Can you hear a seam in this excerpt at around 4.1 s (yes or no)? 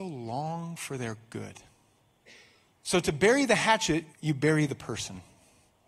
yes